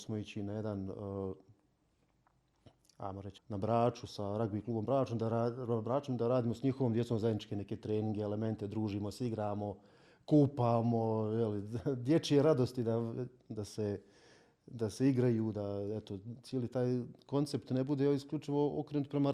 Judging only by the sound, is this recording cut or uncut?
cut